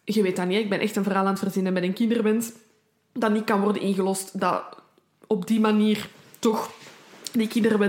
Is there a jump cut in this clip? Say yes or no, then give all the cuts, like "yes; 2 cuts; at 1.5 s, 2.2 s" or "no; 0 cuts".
no; 0 cuts